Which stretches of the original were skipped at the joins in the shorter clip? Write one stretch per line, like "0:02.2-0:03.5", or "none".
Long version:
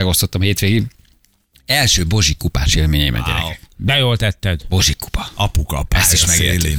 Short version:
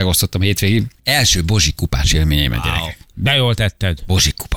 0:01.0-0:01.6

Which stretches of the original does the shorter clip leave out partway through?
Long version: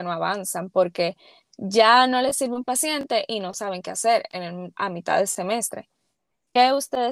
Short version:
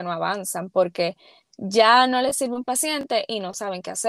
none

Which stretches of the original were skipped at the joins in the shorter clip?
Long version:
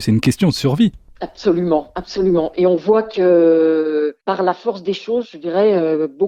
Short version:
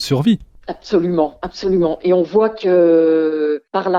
none

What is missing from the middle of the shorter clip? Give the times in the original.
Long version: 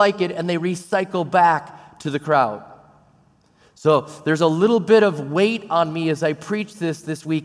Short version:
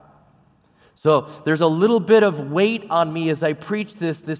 none

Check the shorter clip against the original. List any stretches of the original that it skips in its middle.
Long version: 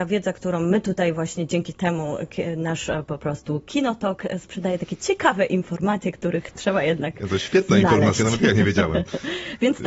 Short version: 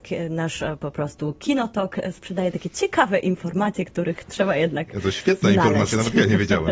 none

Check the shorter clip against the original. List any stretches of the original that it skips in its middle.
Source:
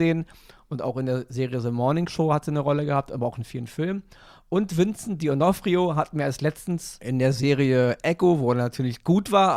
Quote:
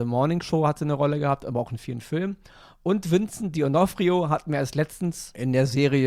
none

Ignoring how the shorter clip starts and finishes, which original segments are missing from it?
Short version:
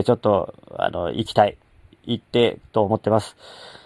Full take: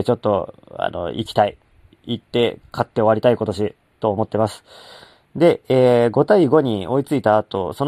0:02.7-0:03.9

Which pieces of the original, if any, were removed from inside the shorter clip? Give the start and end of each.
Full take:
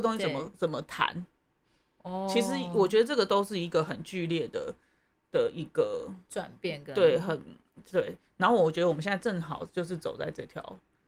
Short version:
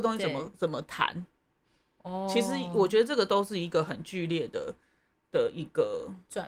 none

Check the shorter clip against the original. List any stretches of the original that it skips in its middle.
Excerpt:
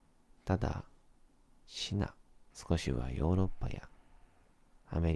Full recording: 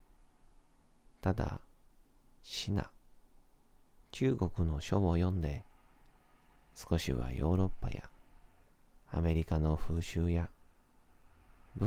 0:03.3-0:06.7

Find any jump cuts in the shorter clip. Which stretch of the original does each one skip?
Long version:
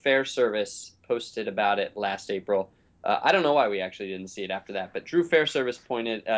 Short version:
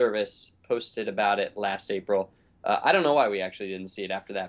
none

